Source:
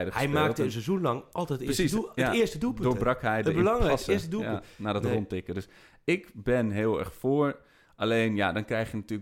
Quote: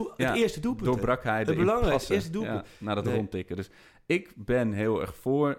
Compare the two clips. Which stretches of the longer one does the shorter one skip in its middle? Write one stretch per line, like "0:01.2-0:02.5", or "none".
none